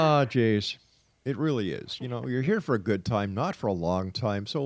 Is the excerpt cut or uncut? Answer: cut